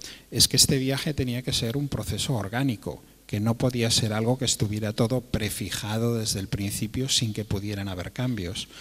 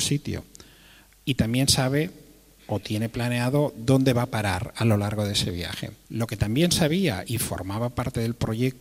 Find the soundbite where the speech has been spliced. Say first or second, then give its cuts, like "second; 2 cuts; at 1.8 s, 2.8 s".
second; 2 cuts; at 6.0 s, 7.2 s